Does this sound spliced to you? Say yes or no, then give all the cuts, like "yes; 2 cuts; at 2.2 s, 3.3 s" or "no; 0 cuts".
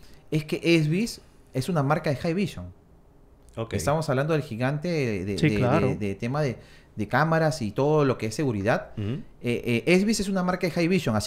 no; 0 cuts